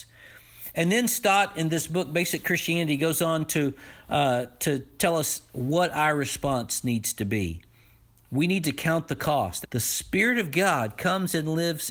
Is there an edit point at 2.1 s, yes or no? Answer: no